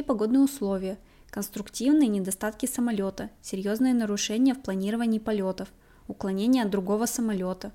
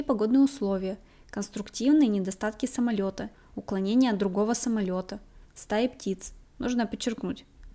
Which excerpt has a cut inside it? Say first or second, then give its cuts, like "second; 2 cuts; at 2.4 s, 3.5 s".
second; 2 cuts; at 3.3 s, 5.5 s